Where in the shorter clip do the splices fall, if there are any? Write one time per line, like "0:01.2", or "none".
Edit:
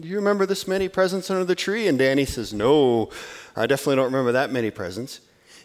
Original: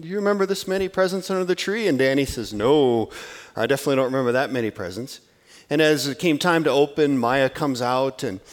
none